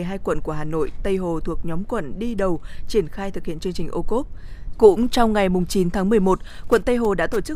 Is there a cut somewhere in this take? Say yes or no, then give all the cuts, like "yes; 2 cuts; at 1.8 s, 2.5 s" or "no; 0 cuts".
yes; 1 cut; at 4.7 s